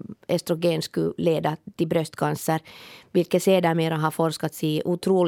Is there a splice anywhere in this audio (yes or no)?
no